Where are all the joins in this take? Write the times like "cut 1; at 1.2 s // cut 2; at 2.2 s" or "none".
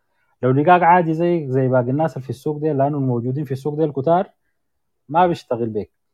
none